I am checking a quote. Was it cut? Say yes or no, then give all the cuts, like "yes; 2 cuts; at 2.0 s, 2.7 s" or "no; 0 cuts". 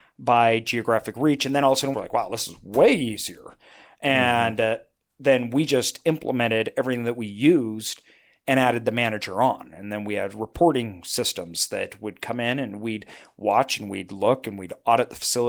yes; 1 cut; at 1.9 s